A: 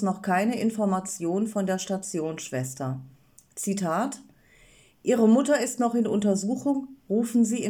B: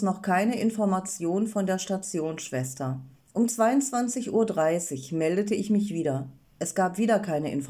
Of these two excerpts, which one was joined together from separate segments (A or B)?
B